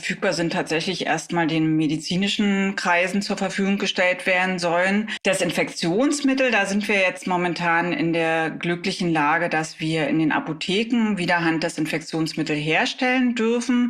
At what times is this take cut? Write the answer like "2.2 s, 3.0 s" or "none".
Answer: 5.2 s